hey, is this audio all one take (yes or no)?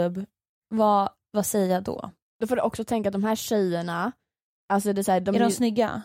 yes